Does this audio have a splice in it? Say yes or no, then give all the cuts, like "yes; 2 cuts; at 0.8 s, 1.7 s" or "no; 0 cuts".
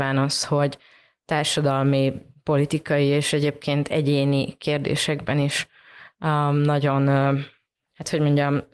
no; 0 cuts